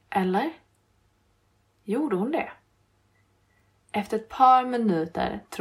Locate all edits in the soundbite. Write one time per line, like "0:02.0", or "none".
none